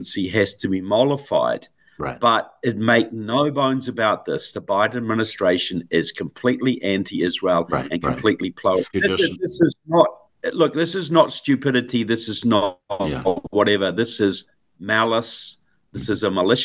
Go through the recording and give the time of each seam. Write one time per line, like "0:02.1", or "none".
0:08.9